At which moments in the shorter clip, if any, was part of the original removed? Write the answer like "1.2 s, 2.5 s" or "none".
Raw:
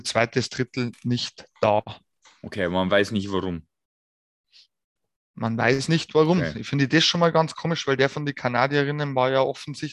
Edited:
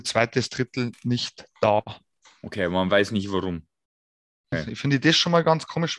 4.5 s

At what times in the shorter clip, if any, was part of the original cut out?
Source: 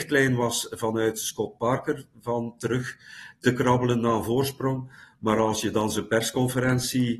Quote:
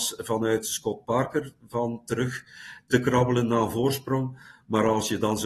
none

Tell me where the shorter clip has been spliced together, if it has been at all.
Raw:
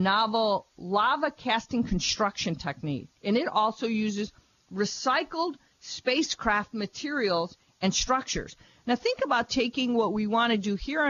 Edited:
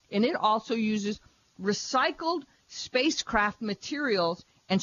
none

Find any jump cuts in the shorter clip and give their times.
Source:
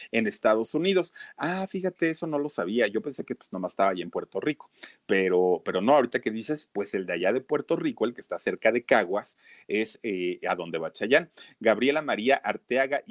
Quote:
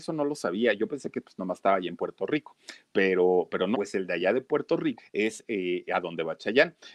3.7 s, 5.0 s

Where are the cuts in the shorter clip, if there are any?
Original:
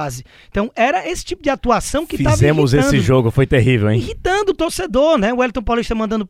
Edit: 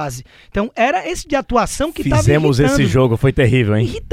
1.2 s

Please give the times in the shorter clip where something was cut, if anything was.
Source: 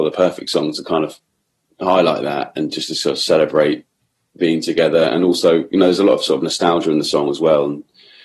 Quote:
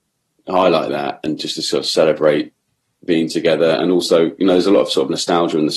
none

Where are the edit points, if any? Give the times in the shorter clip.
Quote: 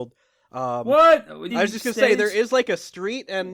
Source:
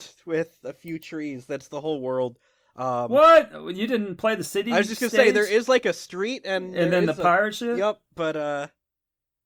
1.5 s

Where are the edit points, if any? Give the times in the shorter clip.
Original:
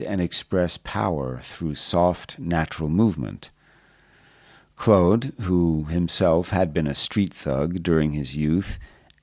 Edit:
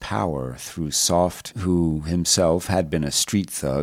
1.5 s

